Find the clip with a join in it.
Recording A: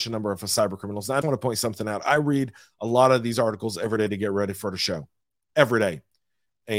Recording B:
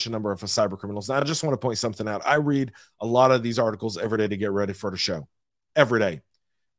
A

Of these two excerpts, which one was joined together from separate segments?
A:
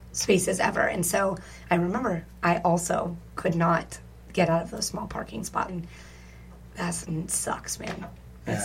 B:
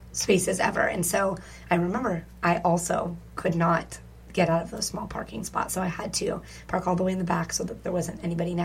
A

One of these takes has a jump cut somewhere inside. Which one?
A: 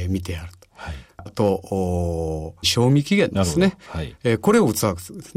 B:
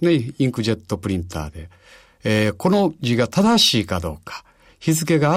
A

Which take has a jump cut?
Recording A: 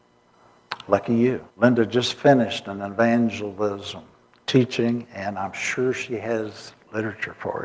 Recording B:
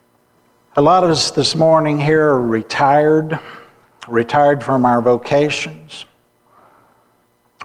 A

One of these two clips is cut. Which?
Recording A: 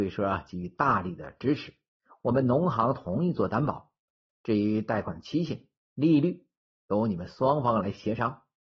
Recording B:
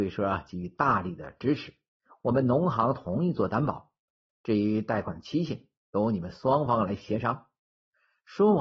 B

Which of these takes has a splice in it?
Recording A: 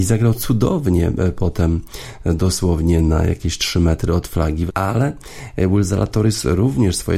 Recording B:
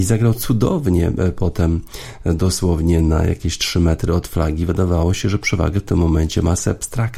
A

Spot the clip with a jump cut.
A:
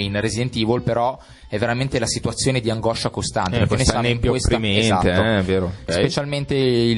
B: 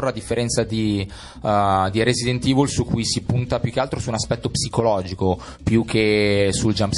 A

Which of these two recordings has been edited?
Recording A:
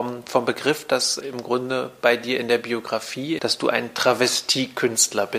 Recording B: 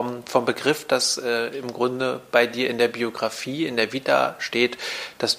A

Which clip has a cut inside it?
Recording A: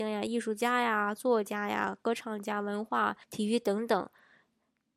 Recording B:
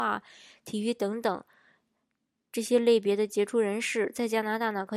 A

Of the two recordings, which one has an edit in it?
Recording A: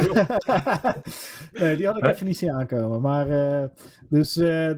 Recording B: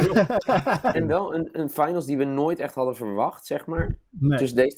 B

